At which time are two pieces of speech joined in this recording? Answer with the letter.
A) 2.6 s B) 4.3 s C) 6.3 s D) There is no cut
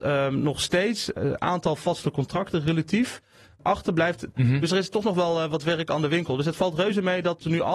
B